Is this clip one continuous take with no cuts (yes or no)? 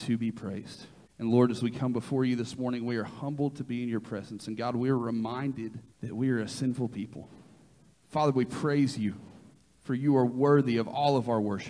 no